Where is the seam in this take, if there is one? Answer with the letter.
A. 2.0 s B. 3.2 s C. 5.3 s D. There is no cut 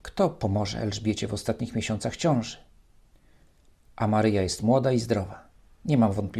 D